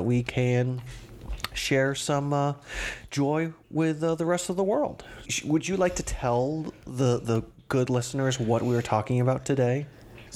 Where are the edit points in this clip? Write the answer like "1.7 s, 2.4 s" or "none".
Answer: 5.2 s